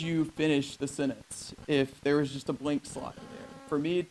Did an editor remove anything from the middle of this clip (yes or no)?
no